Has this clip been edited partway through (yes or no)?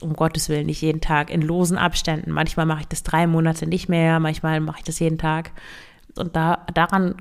yes